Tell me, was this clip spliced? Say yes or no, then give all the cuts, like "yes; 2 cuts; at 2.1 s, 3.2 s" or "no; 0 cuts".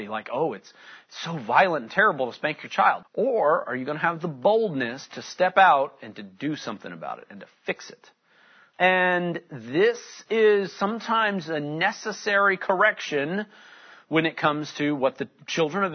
yes; 2 cuts; at 3.0 s, 8.7 s